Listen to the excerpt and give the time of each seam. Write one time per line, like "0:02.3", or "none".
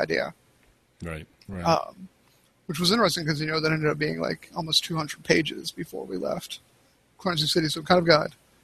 none